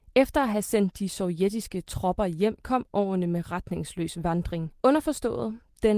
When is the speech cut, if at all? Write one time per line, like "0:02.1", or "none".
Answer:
0:04.8

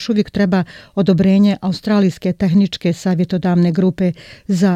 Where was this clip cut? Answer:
none

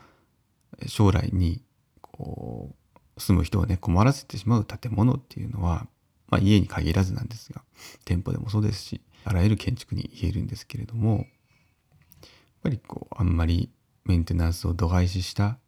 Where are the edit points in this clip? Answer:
0:09.2

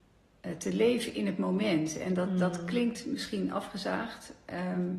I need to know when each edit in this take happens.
none

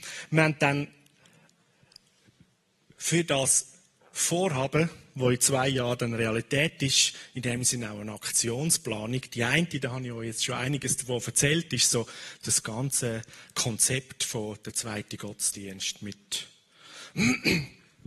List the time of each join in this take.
none

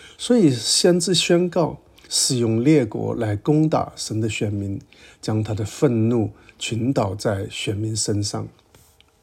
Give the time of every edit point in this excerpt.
0:02.0

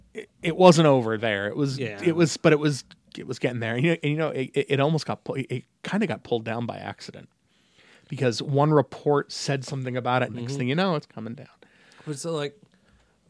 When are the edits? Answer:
0:10.3

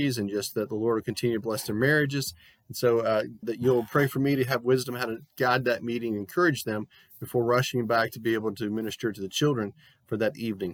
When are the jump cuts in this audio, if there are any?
0:03.4

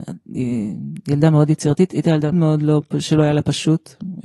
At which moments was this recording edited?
0:02.3

